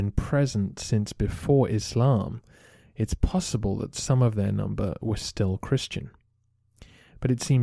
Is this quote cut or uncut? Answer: uncut